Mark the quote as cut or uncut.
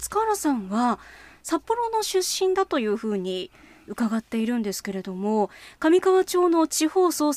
uncut